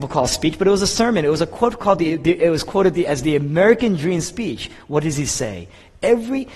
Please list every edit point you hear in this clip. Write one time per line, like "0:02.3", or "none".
none